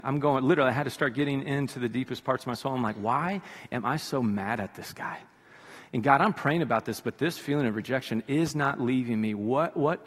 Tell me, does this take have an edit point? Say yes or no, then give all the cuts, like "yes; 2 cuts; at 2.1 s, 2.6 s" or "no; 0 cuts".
no; 0 cuts